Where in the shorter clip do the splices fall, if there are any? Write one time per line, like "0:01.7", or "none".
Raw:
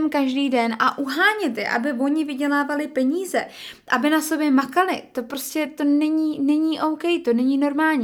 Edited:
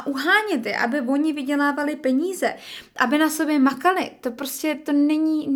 none